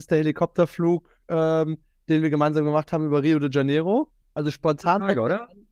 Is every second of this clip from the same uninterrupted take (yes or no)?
no